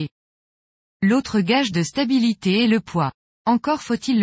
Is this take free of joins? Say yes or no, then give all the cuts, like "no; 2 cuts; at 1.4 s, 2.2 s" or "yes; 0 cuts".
yes; 0 cuts